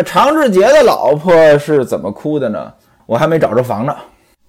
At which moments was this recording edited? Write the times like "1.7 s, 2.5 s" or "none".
3.0 s